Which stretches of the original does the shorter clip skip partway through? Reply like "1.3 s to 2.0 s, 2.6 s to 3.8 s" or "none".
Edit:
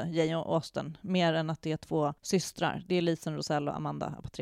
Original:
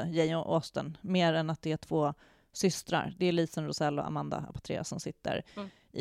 2.2 s to 2.5 s